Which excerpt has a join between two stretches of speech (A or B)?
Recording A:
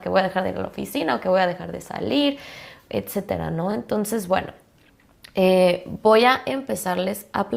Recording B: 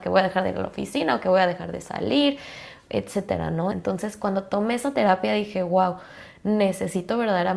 B